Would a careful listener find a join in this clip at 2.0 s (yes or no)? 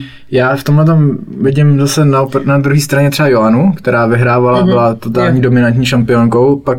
no